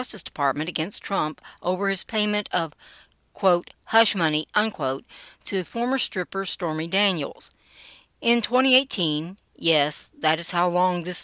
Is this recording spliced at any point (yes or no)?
no